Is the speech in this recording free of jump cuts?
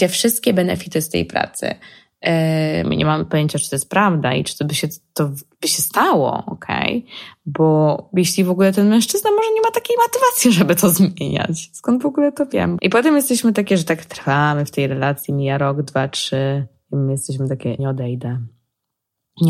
no; 3 cuts; at 2.8 s, 12.8 s, 17.8 s

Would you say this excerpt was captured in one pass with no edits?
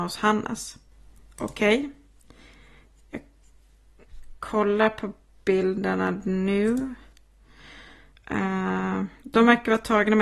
no; 1 cut; at 4.4 s

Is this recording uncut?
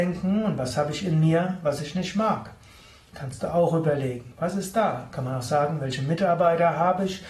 yes; 0 cuts

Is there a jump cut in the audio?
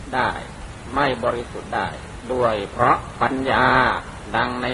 no; 0 cuts

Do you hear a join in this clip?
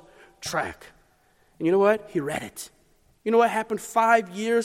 no; 0 cuts

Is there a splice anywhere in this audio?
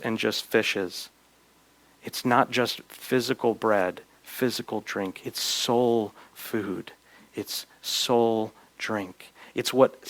no; 0 cuts

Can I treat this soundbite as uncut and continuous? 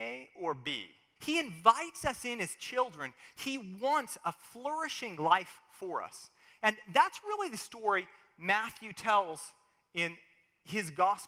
no; 1 cut; at 1.2 s

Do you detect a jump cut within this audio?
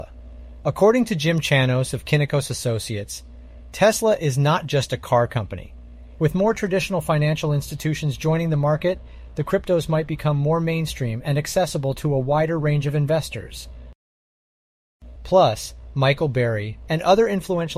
yes; 3 cuts; at 6.2 s, 15.2 s, 16.9 s

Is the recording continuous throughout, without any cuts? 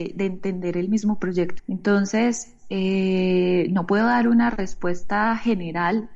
no; 1 cut; at 1.6 s

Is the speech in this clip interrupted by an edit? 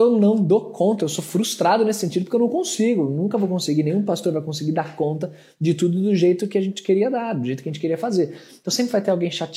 no; 0 cuts

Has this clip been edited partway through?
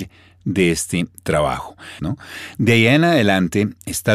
yes; 1 cut; at 2.0 s

